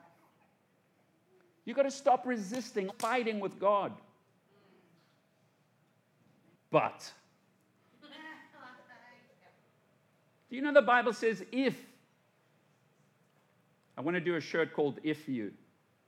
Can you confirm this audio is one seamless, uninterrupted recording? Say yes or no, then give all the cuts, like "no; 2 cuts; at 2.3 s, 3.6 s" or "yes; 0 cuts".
no; 1 cut; at 2.9 s